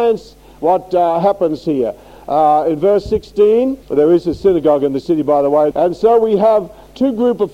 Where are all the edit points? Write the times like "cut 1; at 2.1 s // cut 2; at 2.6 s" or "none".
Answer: cut 1; at 3.8 s // cut 2; at 5.7 s